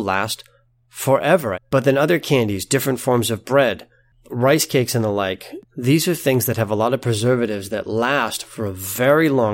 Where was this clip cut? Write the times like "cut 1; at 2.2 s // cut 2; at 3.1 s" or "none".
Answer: cut 1; at 1.5 s // cut 2; at 5.6 s